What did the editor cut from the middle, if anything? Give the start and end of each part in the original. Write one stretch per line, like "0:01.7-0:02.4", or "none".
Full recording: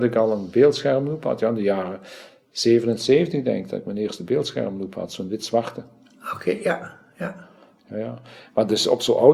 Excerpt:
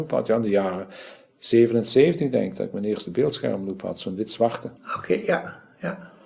0:05.9-0:06.1